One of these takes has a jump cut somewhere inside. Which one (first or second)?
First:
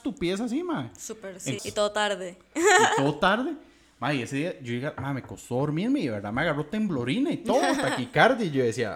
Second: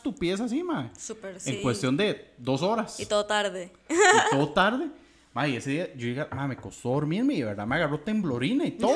first